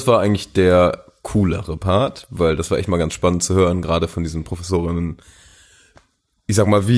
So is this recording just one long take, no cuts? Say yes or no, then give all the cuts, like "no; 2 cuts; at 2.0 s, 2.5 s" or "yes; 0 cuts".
yes; 0 cuts